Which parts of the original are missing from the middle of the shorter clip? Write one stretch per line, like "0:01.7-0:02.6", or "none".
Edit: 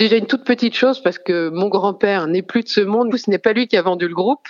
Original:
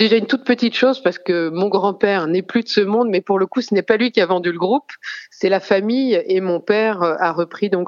0:03.1-0:03.5